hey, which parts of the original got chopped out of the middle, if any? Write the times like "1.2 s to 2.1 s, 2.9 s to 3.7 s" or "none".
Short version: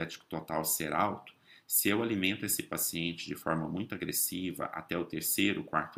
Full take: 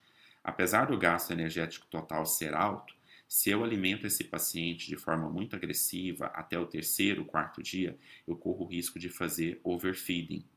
none